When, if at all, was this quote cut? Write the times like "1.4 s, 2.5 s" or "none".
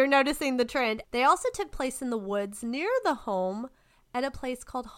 1.0 s